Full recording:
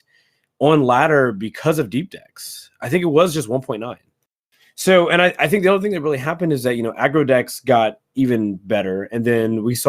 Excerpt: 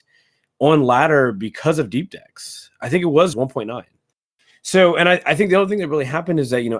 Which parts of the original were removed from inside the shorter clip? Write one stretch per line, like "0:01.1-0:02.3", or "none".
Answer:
0:03.3-0:03.5